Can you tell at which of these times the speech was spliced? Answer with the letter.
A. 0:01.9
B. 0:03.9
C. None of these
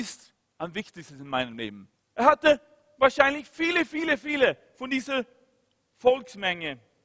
A